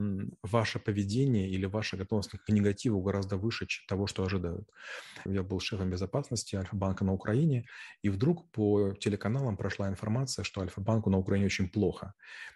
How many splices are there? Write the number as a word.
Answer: one